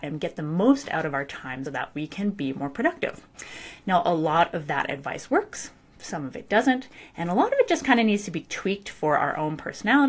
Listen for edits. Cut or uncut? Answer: cut